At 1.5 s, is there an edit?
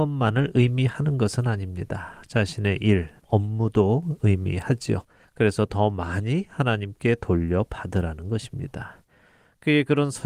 no; 2 cuts; at 3.2 s, 5.2 s

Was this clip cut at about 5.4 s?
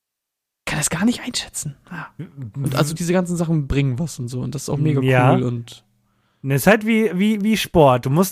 no; 1 cut; at 3.0 s

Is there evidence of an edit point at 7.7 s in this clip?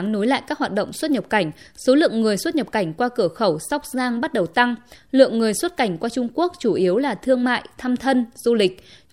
no; 1 cut; at 4.9 s

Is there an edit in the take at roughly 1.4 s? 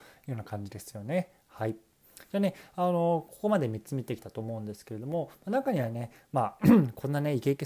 no; 0 cuts

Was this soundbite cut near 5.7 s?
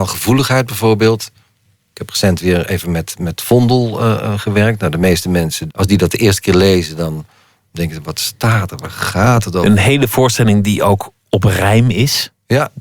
yes; 1 cut; at 5.7 s

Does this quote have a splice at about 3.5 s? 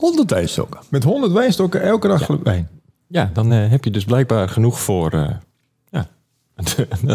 no; 0 cuts

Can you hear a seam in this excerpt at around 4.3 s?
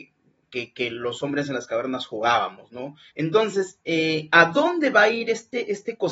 no; 1 cut; at 3.1 s

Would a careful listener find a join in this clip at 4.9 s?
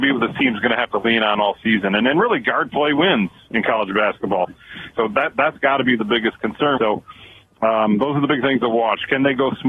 yes; 2 cuts; at 4.9 s, 6.8 s

